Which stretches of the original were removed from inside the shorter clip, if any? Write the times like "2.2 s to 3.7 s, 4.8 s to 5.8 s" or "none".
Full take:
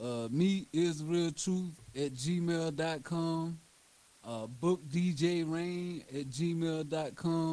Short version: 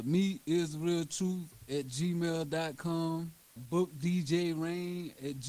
3.8 s to 4.5 s